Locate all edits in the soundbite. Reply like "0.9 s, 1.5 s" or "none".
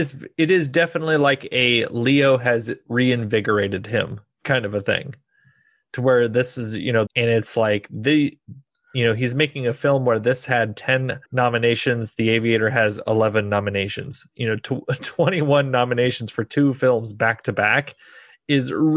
7.1 s, 11.2 s